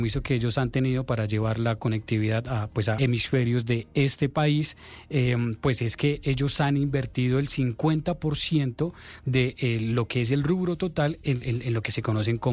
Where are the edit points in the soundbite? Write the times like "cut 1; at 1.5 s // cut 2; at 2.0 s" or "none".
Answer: cut 1; at 3.0 s